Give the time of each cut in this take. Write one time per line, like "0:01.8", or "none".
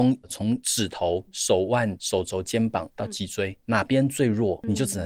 none